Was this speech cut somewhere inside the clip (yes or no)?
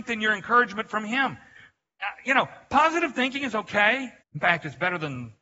yes